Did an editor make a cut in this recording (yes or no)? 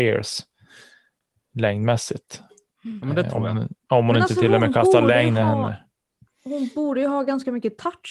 no